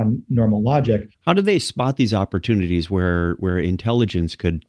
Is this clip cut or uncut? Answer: cut